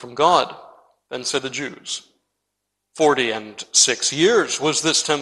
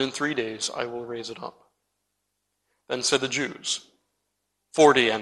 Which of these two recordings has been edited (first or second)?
first